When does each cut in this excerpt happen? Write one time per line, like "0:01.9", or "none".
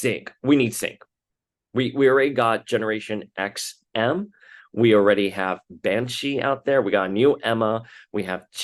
none